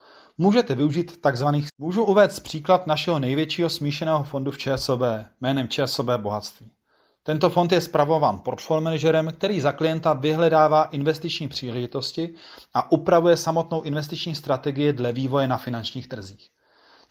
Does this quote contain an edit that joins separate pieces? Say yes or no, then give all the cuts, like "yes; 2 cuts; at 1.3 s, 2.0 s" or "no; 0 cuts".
yes; 1 cut; at 1.7 s